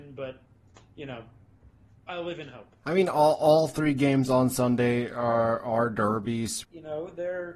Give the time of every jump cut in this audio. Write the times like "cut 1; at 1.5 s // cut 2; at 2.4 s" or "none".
cut 1; at 2.8 s // cut 2; at 6.6 s